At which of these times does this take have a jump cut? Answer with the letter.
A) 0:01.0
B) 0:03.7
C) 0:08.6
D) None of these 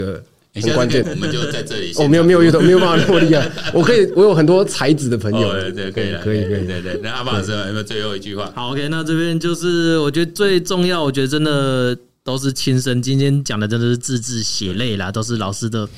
A